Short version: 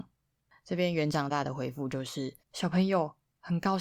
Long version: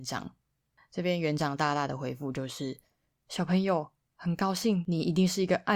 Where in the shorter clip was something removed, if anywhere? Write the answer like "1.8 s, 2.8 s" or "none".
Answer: 1.3 s, 2.4 s